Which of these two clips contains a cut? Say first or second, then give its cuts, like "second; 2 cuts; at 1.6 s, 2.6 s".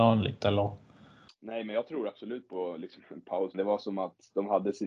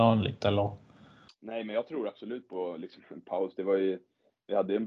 first; 1 cut; at 3.5 s